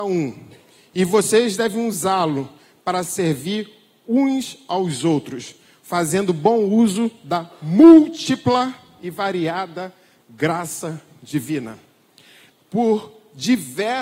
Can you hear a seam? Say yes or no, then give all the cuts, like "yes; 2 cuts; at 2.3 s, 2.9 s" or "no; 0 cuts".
yes; 1 cut; at 12.5 s